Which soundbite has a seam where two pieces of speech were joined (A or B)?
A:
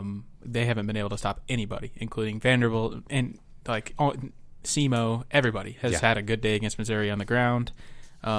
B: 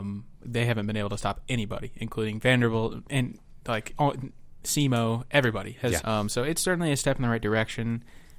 B